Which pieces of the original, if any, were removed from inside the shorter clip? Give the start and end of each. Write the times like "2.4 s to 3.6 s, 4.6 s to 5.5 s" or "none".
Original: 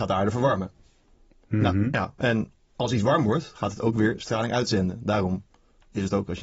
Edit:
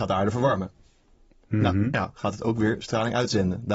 2.1 s to 3.5 s